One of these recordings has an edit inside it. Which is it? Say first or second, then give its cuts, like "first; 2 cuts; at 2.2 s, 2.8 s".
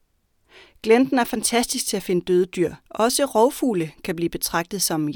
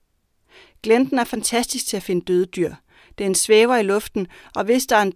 first; 1 cut; at 2.9 s